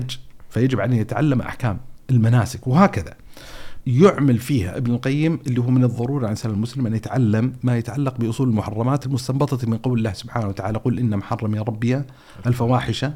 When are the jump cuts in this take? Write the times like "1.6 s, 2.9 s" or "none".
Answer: 3.8 s